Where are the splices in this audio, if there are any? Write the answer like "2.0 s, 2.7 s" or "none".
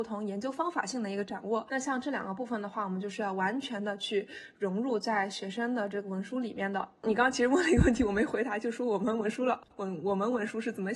none